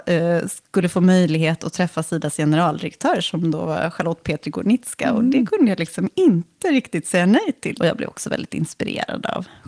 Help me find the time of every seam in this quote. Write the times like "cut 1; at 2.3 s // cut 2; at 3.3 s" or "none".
cut 1; at 7.8 s